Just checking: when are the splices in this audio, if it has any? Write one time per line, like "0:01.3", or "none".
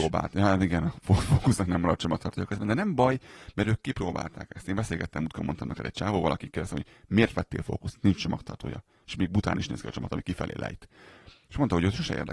none